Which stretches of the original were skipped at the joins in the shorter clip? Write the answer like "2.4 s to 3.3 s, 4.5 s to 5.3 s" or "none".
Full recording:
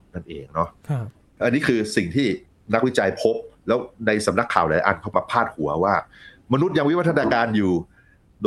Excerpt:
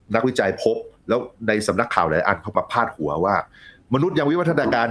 none